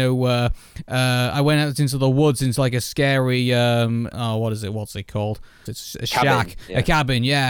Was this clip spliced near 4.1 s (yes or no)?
yes